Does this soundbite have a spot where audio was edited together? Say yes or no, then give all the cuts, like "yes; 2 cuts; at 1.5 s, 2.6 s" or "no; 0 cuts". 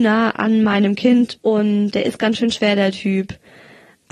yes; 1 cut; at 1.9 s